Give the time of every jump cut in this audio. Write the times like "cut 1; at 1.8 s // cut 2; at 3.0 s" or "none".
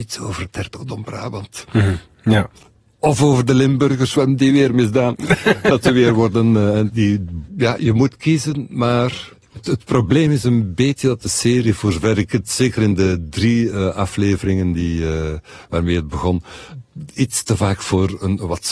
none